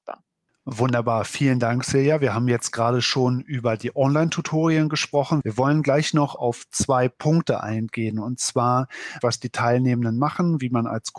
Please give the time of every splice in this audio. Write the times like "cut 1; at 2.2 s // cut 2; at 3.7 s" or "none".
cut 1; at 5.4 s // cut 2; at 9.2 s